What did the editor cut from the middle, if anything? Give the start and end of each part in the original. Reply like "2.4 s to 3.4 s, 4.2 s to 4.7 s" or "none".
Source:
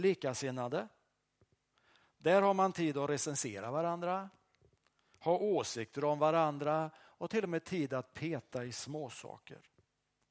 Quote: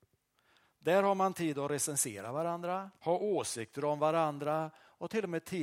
4.4 s to 5.2 s